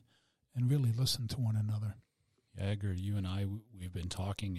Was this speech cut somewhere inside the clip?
yes; 1 cut; at 2.5 s

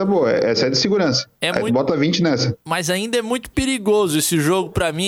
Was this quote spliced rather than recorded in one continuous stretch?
no; 0 cuts

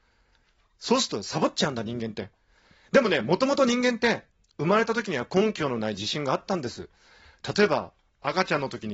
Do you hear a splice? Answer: no; 0 cuts

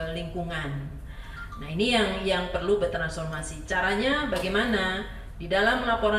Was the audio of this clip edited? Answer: no; 0 cuts

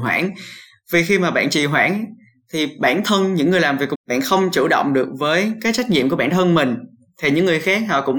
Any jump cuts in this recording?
yes; 1 cut; at 3.9 s

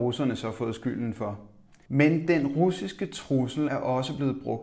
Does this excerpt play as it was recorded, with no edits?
no; 2 cuts; at 1.9 s, 3.7 s

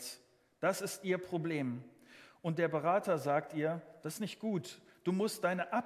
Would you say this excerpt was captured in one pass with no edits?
yes; 0 cuts

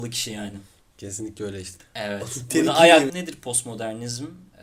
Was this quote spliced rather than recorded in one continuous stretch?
yes; 2 cuts; at 1.8 s, 3.1 s

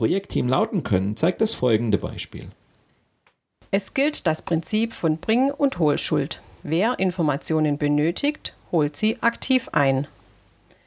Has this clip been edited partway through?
yes; 1 cut; at 6.6 s

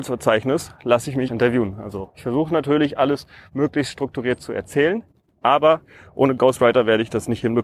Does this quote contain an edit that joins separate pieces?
yes; 1 cut; at 1.3 s

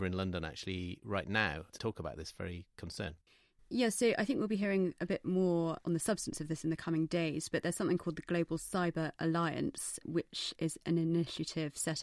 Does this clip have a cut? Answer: no; 0 cuts

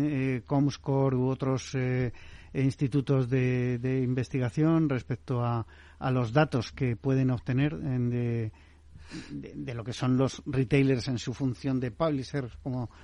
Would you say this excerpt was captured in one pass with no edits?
yes; 0 cuts

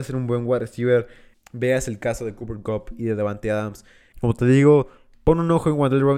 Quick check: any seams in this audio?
yes; 2 cuts; at 1.3 s, 4.1 s

